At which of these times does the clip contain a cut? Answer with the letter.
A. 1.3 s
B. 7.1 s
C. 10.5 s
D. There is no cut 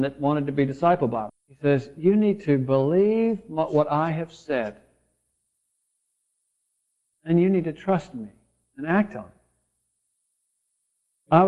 A